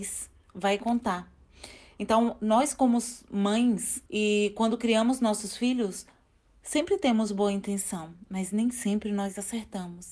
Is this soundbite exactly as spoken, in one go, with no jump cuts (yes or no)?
no